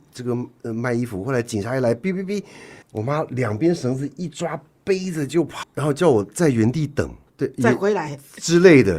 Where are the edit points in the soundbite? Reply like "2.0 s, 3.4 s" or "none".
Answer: 2.8 s, 5.6 s, 7.3 s

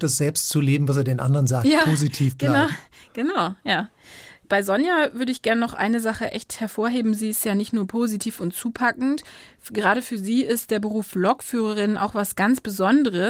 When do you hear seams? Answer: none

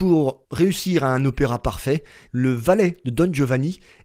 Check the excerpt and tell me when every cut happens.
2.2 s

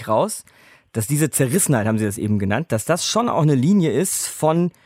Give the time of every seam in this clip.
none

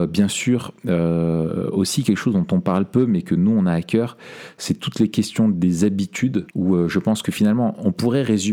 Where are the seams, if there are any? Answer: 6.5 s

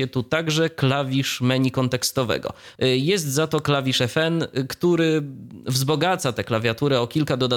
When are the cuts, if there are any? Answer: 2.8 s

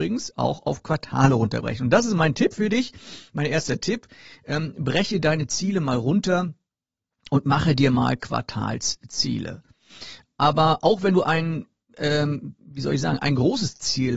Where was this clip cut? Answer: none

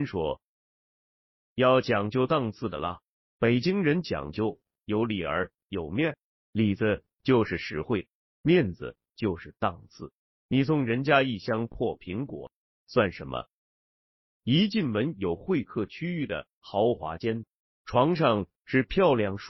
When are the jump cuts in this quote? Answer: 14.4 s, 17.6 s

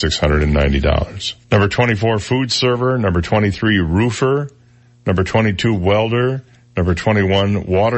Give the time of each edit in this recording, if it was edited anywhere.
1.4 s

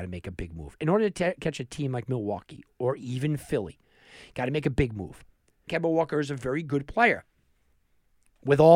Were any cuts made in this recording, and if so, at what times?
5.7 s

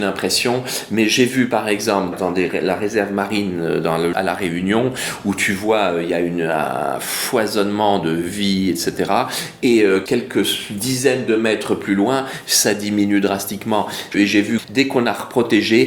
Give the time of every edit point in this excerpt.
4.1 s, 14.1 s

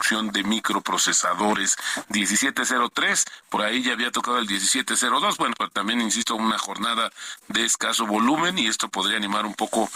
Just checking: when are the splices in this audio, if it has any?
2.0 s

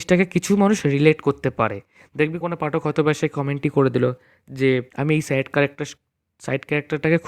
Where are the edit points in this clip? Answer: 2.4 s, 4.9 s

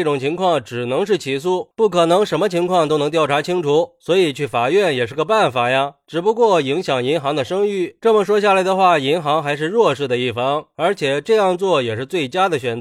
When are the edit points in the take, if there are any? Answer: 1.7 s

